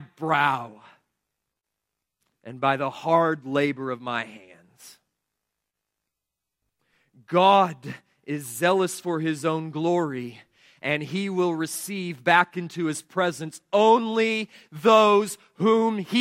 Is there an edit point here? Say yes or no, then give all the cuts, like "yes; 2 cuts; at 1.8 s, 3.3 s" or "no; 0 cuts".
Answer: no; 0 cuts